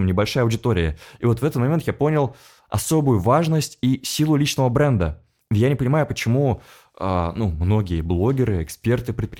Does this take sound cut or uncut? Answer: uncut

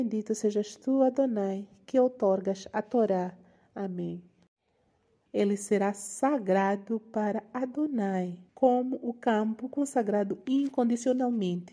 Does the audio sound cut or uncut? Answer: cut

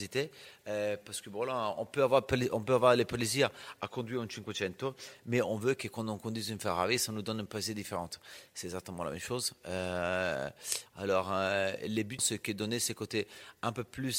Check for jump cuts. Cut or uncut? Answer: cut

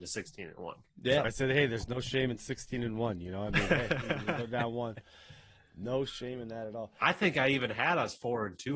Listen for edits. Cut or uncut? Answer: cut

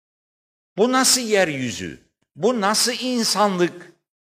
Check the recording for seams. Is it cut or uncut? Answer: uncut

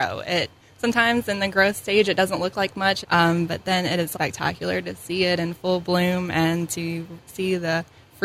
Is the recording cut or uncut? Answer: cut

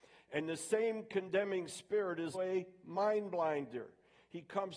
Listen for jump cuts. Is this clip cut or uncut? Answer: cut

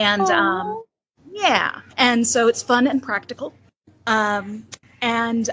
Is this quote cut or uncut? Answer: cut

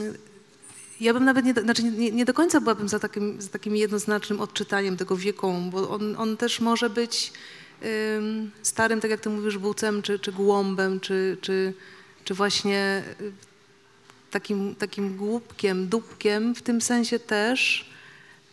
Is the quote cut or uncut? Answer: uncut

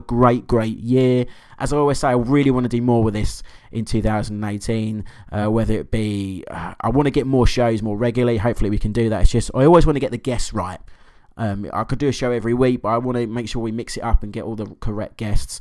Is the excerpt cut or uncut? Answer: uncut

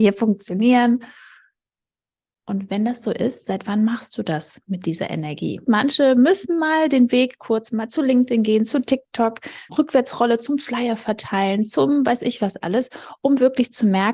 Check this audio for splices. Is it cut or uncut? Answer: cut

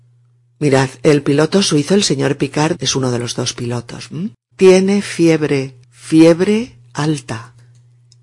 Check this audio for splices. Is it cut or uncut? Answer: cut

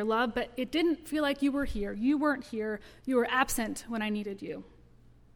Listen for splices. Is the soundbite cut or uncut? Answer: uncut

